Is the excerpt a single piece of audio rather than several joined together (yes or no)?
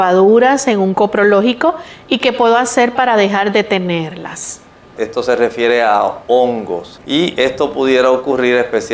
no